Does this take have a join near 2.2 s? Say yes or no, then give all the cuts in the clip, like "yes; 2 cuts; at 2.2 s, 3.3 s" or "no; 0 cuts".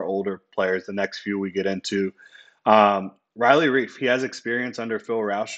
no; 0 cuts